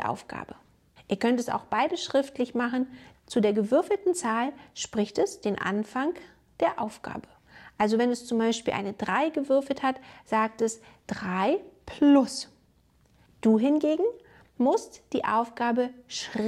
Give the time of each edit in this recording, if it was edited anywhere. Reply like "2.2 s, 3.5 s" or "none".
3.1 s, 13.3 s